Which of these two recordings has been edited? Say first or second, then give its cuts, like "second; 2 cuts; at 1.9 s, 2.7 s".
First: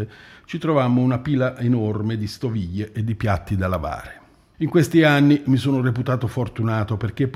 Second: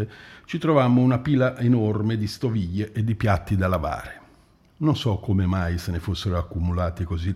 first; 1 cut; at 4.5 s